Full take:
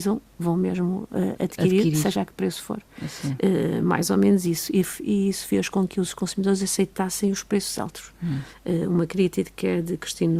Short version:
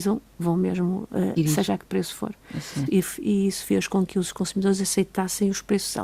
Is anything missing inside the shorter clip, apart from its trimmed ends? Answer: yes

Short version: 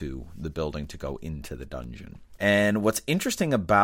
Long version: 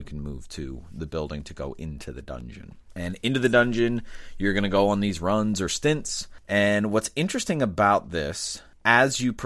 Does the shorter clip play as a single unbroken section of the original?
no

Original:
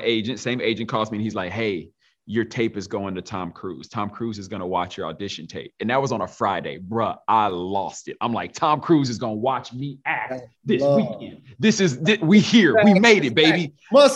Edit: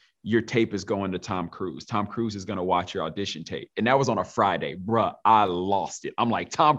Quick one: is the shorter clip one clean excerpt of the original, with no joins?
yes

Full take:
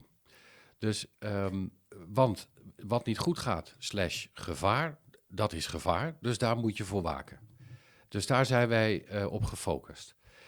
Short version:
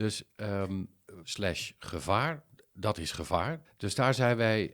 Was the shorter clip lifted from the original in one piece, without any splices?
no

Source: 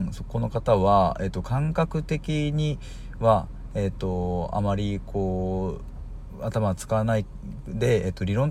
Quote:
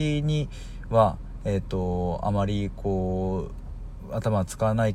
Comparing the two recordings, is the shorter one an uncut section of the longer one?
yes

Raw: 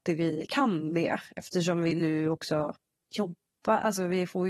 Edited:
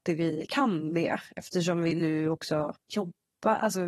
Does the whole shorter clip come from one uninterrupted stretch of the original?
no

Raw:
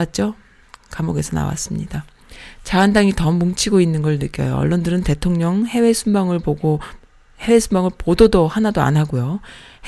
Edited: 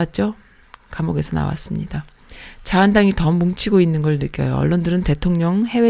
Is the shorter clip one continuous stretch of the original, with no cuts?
yes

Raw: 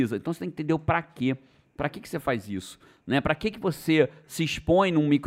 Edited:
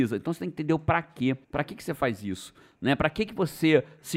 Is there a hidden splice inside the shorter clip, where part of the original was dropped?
yes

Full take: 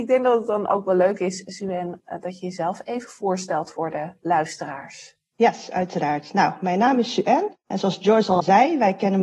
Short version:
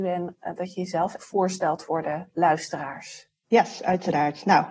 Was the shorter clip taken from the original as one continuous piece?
no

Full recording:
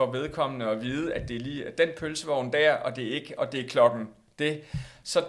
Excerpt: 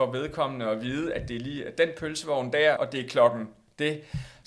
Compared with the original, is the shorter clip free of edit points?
no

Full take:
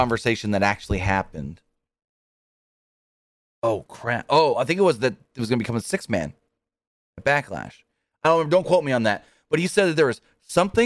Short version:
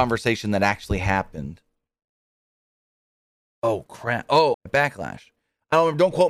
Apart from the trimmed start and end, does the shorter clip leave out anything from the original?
yes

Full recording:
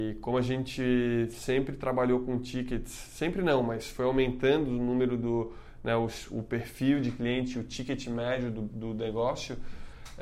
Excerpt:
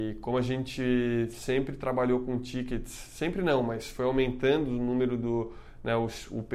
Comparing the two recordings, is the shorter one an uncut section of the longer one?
yes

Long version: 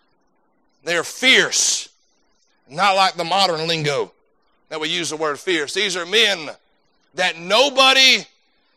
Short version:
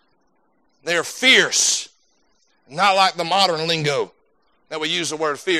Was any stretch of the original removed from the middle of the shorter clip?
no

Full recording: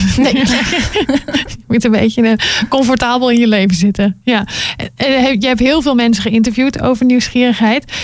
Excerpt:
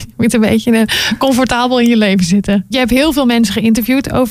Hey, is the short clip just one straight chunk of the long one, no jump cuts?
no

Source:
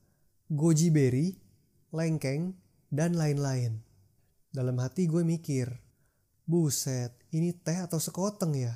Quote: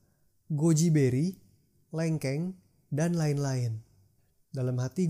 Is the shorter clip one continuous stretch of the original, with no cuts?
yes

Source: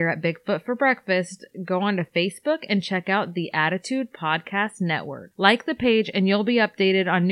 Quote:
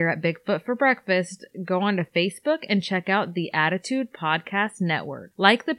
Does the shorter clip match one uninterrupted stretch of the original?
yes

